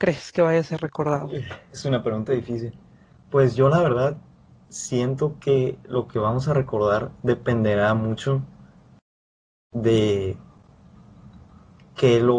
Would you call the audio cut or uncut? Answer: uncut